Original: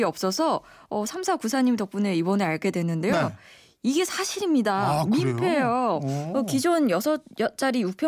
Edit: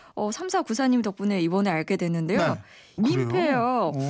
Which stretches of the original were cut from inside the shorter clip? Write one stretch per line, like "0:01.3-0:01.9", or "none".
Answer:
0:03.7-0:05.1